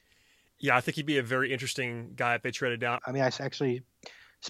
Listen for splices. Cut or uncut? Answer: cut